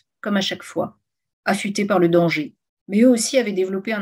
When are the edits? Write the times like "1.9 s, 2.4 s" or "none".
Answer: 2.8 s